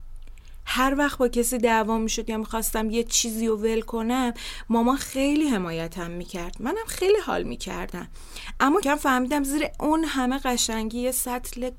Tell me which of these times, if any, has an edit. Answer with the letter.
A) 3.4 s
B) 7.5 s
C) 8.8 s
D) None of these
C